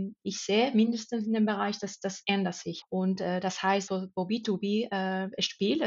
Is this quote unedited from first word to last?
no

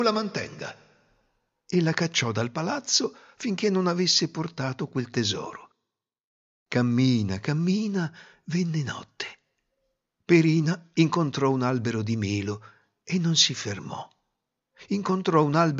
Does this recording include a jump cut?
no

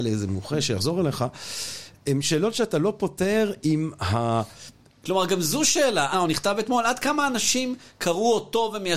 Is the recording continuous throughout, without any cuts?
no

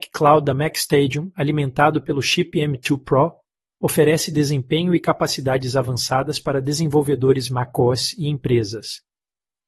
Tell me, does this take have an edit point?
no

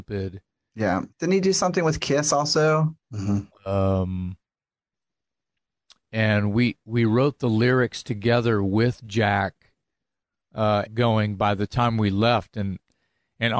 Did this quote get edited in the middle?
yes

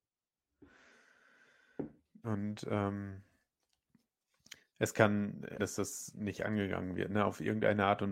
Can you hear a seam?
yes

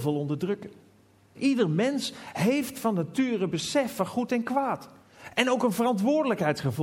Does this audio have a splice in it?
yes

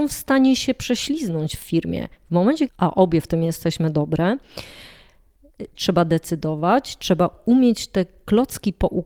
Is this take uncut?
no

